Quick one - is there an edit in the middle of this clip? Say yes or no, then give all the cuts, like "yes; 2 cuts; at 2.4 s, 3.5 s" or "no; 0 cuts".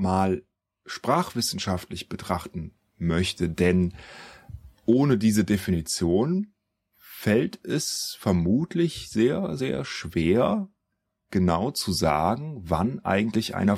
no; 0 cuts